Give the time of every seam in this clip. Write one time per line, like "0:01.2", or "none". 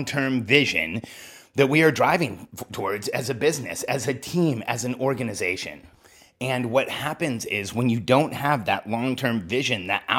none